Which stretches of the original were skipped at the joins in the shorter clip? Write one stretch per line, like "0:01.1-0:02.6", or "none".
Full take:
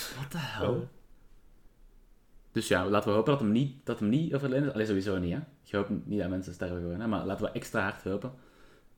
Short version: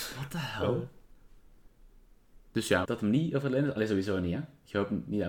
0:02.8-0:03.8